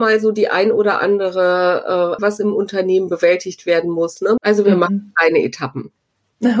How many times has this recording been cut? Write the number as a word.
two